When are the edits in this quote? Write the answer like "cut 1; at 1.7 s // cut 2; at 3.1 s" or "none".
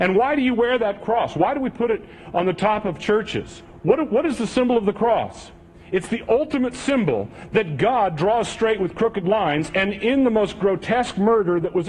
none